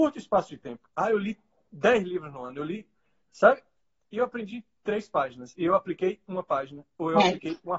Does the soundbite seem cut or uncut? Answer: uncut